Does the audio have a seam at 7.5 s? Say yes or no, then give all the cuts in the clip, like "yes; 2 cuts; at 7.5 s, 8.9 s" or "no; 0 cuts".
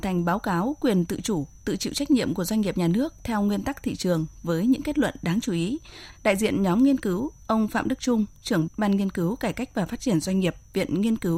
no; 2 cuts; at 6.1 s, 8.7 s